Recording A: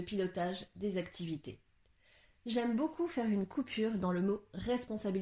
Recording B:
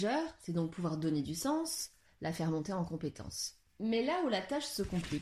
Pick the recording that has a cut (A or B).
B